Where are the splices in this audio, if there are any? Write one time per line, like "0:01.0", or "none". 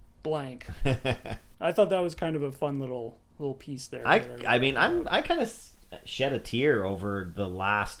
none